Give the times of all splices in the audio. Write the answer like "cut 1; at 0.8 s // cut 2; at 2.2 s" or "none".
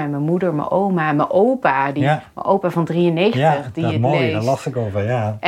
none